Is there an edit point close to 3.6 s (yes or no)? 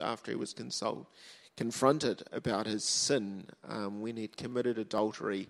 no